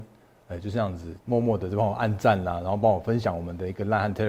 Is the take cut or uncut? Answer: cut